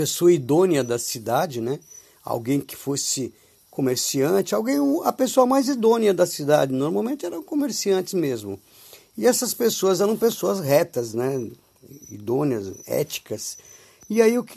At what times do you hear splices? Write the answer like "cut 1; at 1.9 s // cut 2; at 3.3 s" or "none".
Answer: none